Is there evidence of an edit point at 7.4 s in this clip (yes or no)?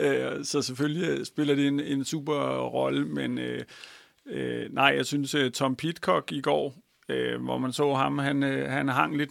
no